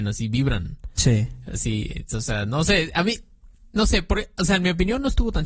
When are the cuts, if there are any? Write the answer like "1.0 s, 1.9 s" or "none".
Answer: none